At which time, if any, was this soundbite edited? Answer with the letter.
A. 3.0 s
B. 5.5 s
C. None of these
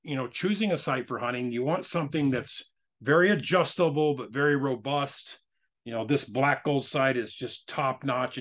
C